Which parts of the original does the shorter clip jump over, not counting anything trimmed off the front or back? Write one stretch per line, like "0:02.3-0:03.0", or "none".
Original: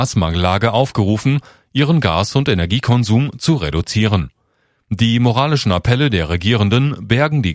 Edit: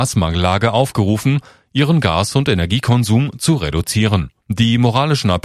0:04.4-0:04.8